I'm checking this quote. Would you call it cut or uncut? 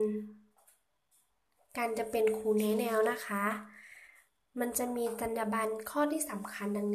uncut